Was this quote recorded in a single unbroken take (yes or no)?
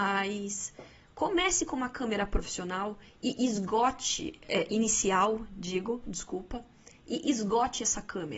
yes